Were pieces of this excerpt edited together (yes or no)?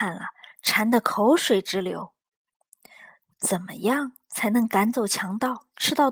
no